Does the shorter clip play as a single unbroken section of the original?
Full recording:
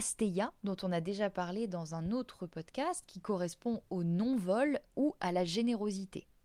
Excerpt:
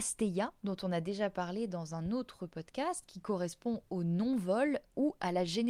yes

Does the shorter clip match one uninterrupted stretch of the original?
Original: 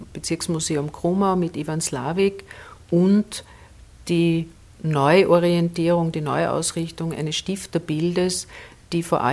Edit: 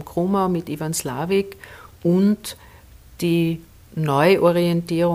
yes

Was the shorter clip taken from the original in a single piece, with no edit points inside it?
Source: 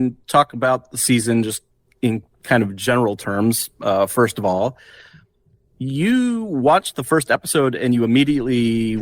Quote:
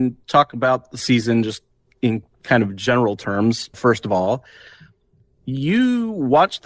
no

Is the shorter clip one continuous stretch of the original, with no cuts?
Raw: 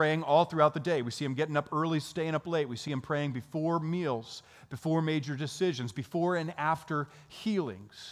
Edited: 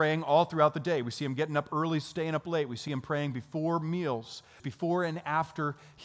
no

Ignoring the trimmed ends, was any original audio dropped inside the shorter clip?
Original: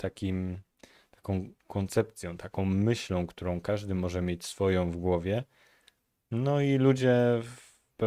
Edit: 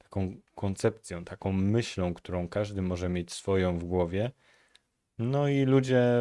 no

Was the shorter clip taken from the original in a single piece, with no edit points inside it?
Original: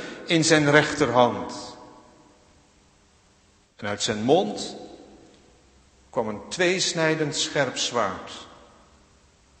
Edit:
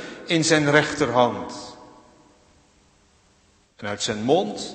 yes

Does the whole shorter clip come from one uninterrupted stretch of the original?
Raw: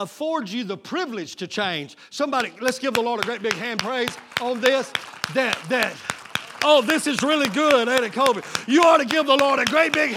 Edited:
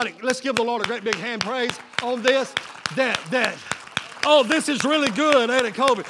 yes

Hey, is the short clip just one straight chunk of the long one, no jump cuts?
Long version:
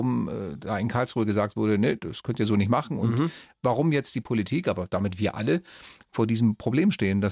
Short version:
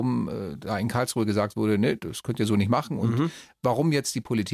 yes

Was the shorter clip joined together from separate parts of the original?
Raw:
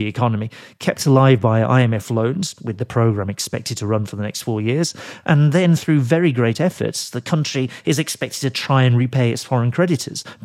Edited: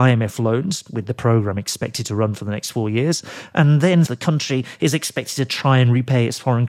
yes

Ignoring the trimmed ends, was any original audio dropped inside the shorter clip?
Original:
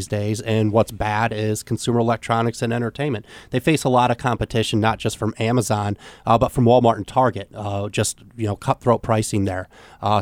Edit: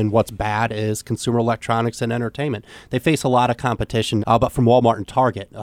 yes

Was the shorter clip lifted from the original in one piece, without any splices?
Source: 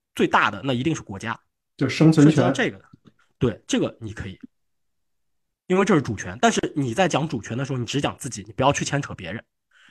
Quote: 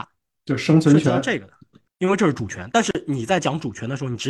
no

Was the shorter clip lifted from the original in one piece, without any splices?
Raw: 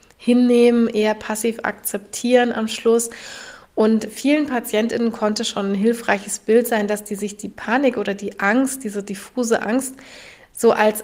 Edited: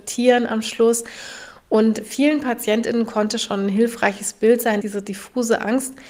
no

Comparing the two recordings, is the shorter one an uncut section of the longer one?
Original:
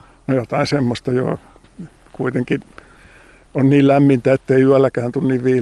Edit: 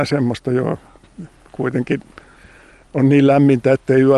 yes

